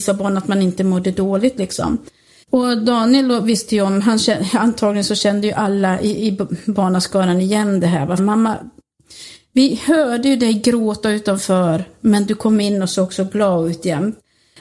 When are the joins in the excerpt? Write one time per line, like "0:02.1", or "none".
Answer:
0:02.4
0:08.2